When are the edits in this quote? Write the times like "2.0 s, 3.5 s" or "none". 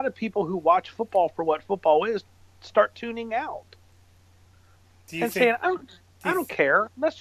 none